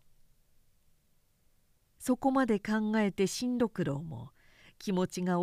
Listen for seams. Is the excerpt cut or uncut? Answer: uncut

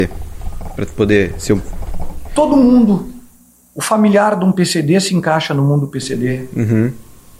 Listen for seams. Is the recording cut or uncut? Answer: uncut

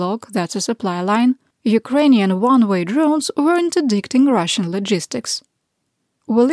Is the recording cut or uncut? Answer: cut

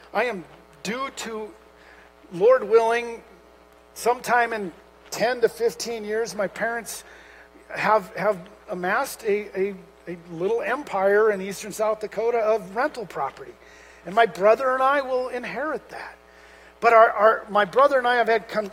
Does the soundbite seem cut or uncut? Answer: uncut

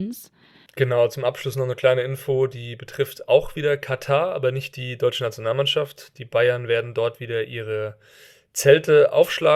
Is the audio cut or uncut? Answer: uncut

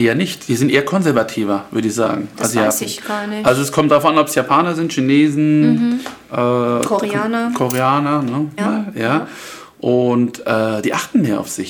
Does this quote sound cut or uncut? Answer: cut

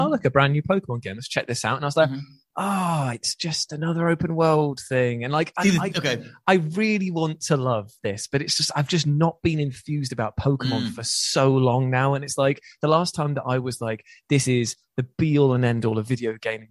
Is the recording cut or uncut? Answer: uncut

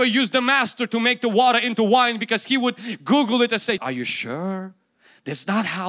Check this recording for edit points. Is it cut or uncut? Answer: cut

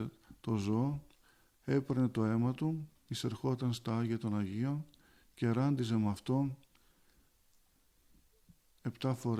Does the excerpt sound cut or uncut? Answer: uncut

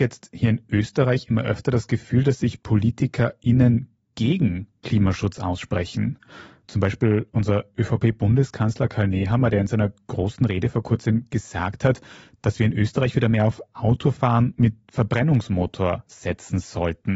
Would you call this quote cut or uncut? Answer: uncut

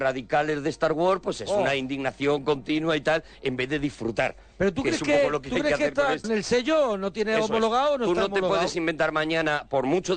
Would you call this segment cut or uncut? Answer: cut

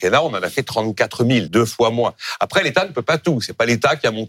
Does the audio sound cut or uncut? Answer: cut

